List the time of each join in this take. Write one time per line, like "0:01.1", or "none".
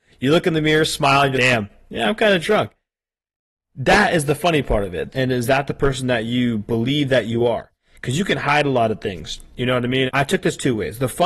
0:01.3
0:05.1
0:10.1